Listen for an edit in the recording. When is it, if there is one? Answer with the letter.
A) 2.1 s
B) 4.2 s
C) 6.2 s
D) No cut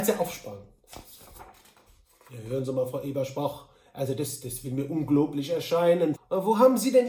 C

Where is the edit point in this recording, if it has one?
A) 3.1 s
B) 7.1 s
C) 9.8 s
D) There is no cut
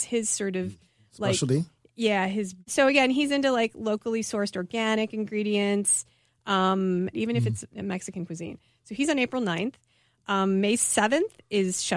B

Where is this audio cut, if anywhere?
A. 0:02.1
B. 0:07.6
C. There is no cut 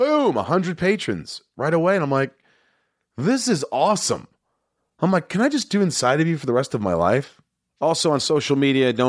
C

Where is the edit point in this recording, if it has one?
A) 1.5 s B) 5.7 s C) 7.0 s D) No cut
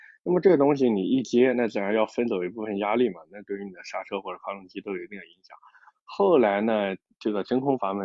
D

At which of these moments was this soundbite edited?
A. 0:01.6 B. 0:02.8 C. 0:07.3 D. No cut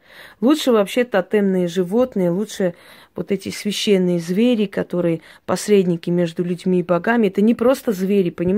D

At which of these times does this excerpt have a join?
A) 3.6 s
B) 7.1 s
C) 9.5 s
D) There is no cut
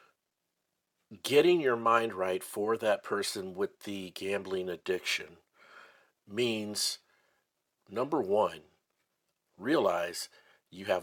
C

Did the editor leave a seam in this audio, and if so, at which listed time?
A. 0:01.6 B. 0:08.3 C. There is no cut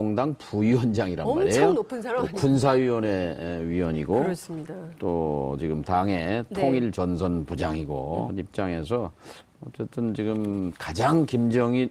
B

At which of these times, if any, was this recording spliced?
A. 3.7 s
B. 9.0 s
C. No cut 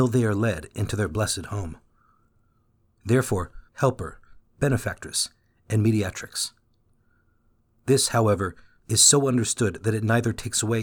A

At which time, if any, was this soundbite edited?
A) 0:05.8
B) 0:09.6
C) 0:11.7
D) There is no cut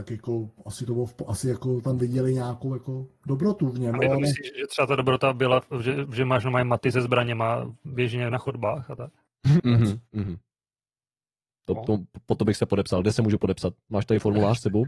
B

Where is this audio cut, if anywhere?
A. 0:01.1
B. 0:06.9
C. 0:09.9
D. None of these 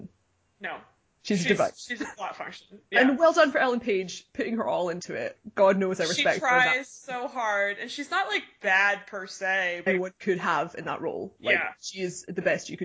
C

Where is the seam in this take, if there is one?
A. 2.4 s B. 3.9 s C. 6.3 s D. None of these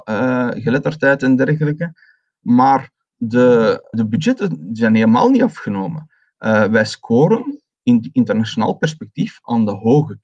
B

